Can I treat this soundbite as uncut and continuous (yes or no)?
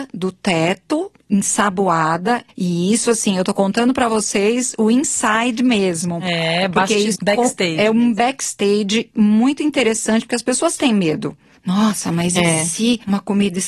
no